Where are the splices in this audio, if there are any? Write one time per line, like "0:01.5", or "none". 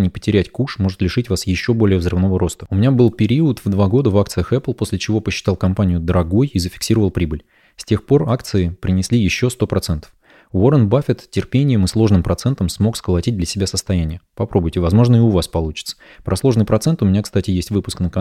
none